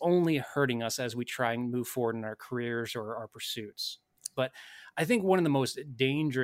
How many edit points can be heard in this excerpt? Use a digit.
1